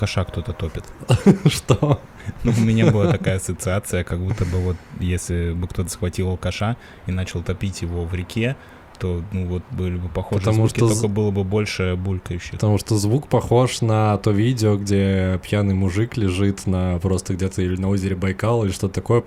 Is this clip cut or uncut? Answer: uncut